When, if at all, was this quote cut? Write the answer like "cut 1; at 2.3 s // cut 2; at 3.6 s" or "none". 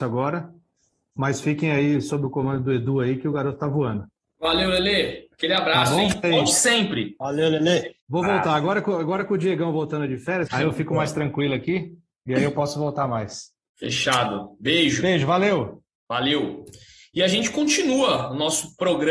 cut 1; at 6.2 s // cut 2; at 10.5 s